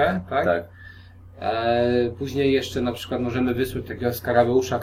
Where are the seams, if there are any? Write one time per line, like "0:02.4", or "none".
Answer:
none